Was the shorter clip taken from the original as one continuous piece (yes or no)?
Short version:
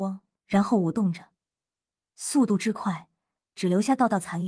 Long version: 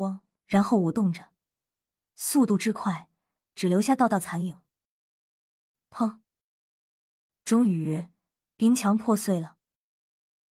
yes